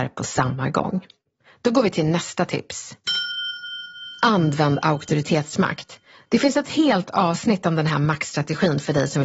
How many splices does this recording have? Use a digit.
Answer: 0